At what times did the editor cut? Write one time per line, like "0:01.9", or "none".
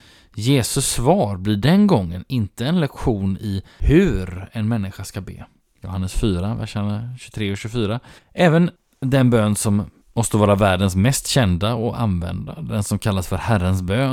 0:05.6
0:08.2